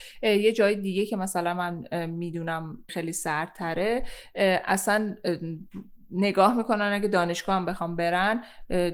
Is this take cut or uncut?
cut